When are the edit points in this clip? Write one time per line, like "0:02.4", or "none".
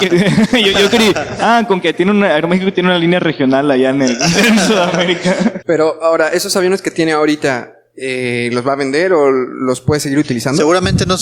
0:05.6